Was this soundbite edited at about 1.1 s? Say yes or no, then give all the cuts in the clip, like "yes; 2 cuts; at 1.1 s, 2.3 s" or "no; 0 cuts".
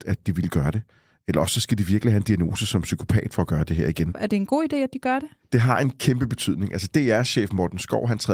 no; 1 cut; at 4.1 s